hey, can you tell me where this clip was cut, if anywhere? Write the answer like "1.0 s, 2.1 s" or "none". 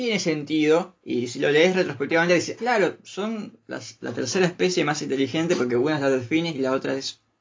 2.6 s